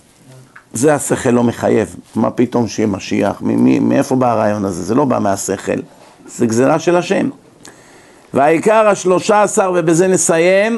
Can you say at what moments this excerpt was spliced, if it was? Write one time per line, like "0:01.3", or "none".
none